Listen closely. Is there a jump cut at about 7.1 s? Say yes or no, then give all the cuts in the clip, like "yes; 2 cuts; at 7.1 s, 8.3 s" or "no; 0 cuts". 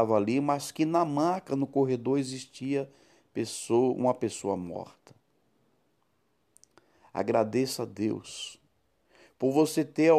no; 0 cuts